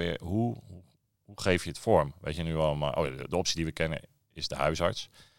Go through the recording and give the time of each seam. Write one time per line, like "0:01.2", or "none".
none